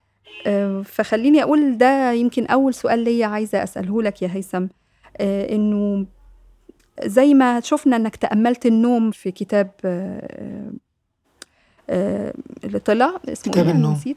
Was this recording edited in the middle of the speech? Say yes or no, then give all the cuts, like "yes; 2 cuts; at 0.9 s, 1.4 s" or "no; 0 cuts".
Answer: yes; 1 cut; at 9.1 s